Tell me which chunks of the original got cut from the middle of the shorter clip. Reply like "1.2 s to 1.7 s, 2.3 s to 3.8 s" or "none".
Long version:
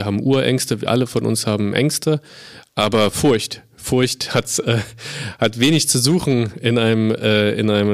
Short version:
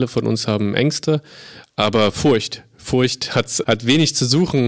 4.6 s to 5.4 s